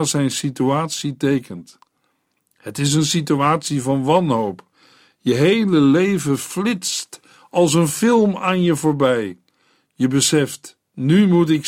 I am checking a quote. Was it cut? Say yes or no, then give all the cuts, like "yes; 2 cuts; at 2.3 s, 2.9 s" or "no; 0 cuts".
no; 0 cuts